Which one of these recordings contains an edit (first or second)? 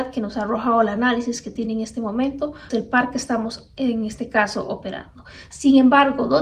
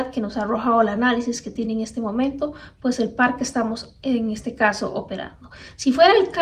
first